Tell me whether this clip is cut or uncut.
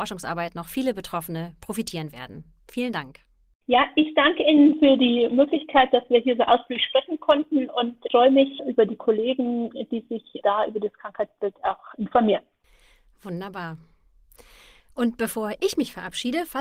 uncut